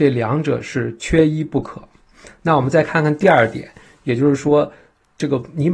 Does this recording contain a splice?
no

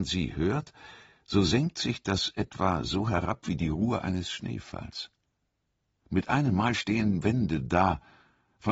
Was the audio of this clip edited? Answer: no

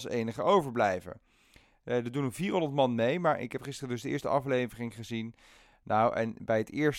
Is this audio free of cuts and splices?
yes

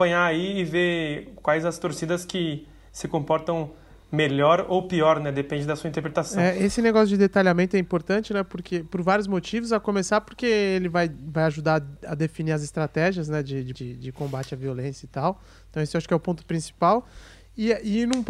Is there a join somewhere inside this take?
yes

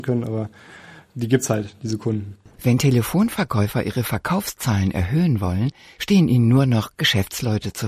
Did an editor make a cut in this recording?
no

